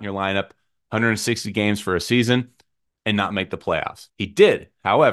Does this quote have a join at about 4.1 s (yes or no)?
yes